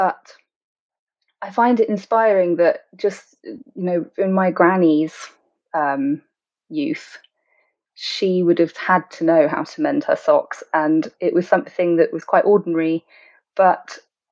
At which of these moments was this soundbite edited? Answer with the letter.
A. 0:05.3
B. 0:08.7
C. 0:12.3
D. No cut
B